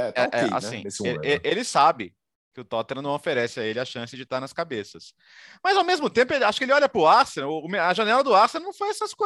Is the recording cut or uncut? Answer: uncut